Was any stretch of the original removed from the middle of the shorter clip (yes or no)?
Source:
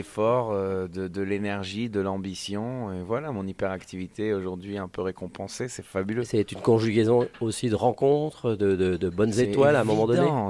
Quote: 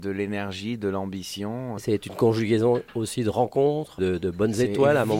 yes